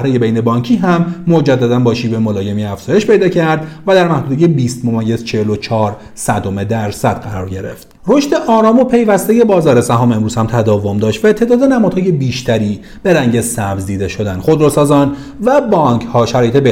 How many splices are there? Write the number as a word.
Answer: one